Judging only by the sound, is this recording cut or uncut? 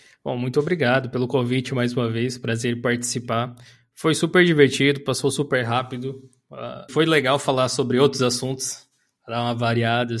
cut